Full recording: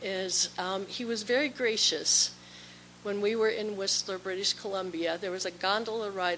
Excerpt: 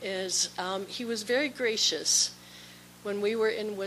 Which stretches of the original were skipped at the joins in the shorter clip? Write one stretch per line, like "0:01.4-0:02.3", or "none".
none